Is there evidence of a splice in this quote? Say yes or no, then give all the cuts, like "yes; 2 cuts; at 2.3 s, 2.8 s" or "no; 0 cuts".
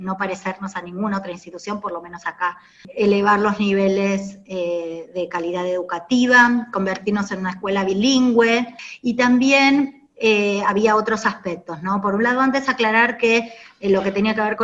no; 0 cuts